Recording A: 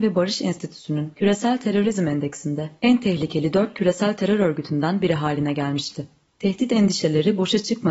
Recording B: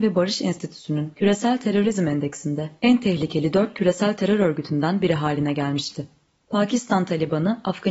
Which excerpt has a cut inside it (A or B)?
A